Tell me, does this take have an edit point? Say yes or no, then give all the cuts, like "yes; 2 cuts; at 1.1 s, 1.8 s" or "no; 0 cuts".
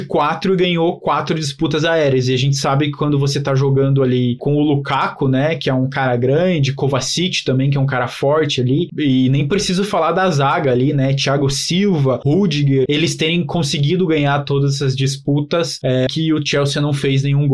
yes; 2 cuts; at 12.9 s, 16.1 s